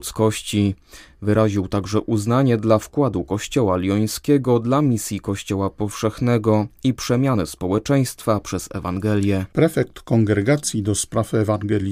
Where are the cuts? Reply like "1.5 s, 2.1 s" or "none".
none